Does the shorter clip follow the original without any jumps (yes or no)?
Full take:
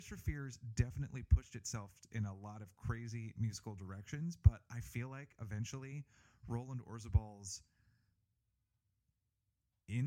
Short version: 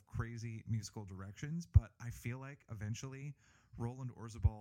yes